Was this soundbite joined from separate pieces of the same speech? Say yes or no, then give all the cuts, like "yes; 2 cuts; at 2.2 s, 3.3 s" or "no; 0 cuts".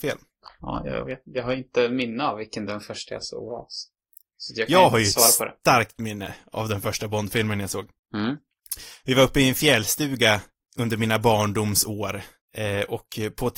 no; 0 cuts